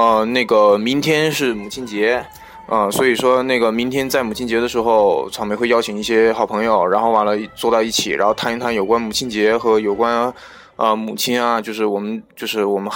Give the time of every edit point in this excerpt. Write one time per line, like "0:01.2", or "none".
none